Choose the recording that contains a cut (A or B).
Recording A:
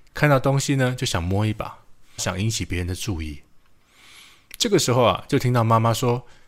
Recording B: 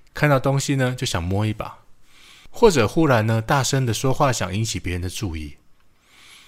A